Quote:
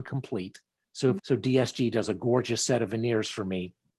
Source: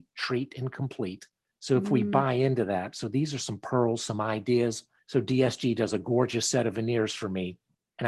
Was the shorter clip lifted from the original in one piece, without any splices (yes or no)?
no